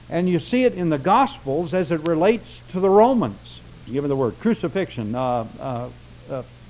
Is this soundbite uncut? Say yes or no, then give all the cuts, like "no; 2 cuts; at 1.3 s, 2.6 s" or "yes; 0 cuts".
no; 1 cut; at 3.9 s